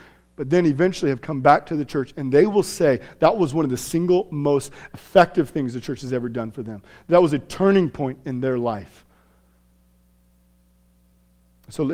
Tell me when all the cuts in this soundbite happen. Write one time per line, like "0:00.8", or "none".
none